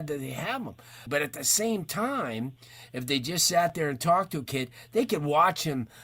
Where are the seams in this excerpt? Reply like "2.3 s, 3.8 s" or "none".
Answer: 1.1 s